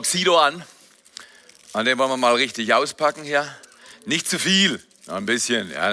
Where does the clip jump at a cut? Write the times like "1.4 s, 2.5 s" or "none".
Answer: none

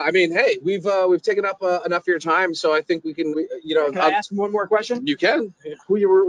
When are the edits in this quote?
3.3 s

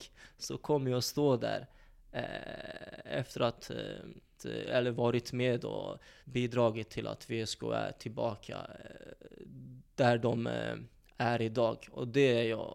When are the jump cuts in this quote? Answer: 4.4 s, 6.2 s

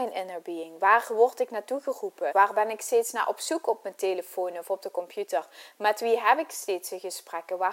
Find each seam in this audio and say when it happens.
2.3 s

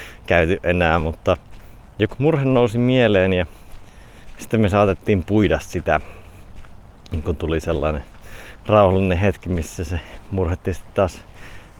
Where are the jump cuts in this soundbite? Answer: 2.1 s

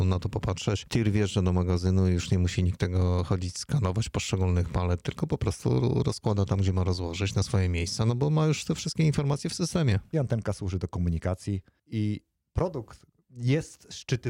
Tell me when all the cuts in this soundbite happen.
10.1 s, 13.2 s

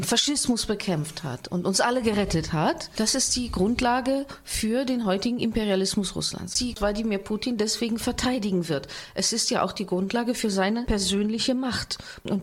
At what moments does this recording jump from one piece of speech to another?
none

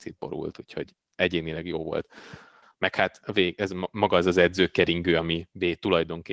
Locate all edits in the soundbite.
2.6 s

